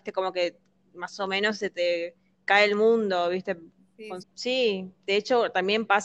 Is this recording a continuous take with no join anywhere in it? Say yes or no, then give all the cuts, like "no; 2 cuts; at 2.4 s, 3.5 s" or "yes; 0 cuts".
no; 1 cut; at 4.2 s